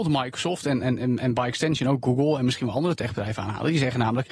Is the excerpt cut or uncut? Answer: uncut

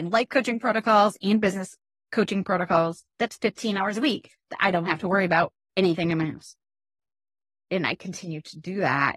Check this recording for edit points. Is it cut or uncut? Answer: cut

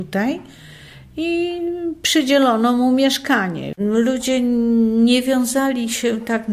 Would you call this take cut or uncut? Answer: cut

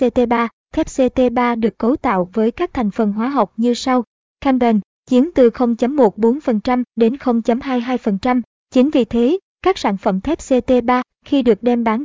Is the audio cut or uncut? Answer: cut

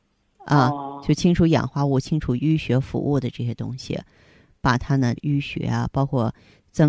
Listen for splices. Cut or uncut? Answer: cut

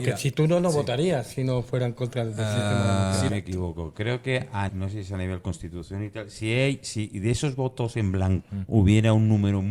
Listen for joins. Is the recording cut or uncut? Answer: cut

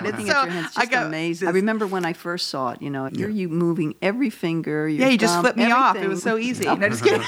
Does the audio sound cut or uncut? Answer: cut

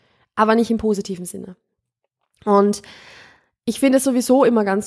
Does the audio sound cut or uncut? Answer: uncut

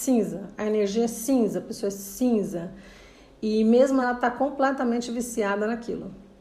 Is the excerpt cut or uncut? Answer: cut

